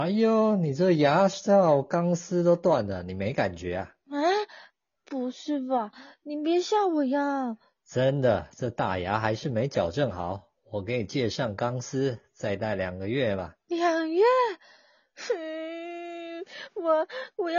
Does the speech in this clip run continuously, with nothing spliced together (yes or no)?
yes